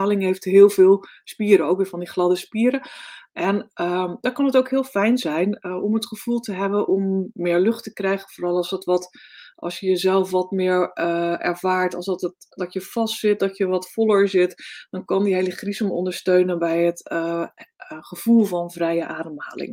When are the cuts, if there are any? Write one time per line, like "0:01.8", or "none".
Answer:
none